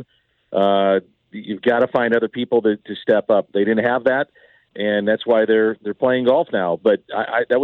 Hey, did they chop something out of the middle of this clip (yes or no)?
no